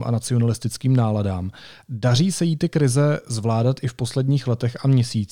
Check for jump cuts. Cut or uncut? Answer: uncut